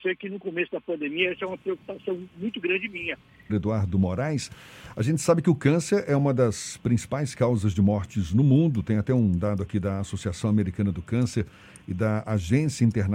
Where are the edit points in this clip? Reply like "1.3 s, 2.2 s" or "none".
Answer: 3.5 s